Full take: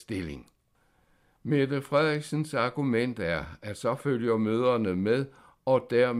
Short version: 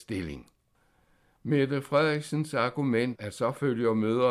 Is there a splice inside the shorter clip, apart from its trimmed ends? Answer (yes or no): yes